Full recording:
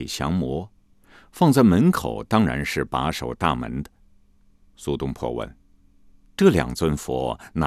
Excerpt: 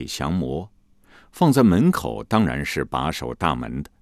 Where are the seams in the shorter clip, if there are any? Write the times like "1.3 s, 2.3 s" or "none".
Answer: none